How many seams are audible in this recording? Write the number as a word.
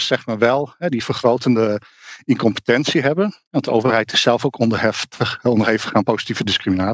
zero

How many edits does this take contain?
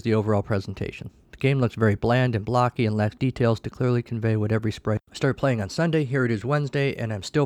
one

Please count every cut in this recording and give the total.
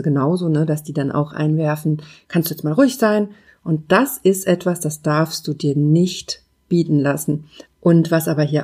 three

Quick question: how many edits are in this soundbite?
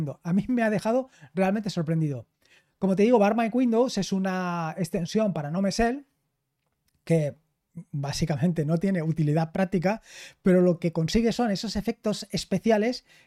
zero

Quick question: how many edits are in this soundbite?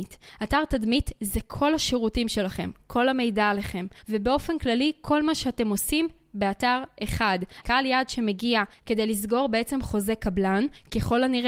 two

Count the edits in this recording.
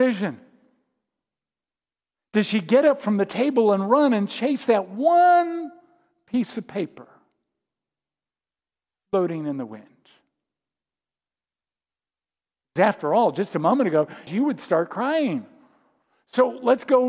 one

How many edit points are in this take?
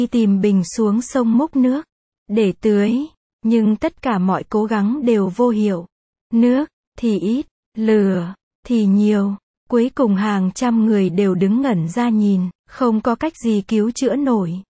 one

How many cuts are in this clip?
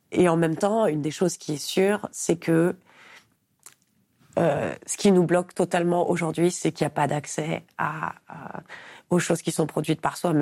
zero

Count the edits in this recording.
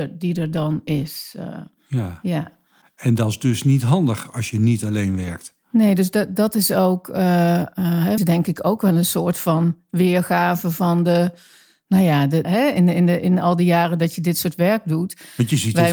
two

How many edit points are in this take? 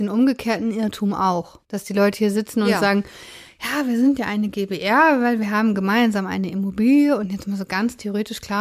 one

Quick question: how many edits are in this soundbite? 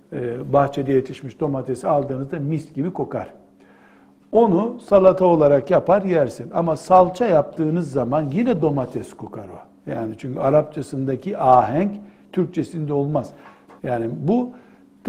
two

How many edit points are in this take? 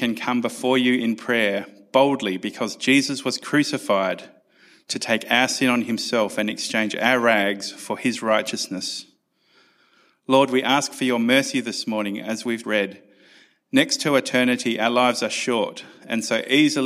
one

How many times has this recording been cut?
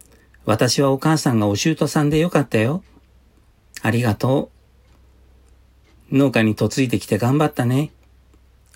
zero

